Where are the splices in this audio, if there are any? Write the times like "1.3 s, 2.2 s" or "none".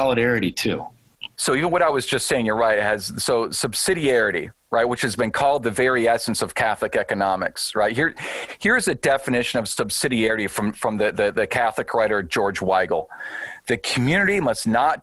1.3 s